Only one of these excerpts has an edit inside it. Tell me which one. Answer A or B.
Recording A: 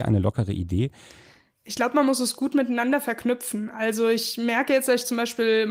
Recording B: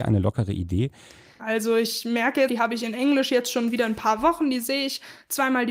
B